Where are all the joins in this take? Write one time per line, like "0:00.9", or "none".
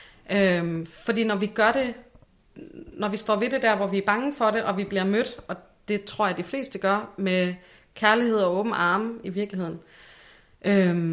none